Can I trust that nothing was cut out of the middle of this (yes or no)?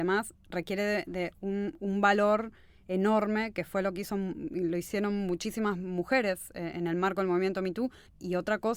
yes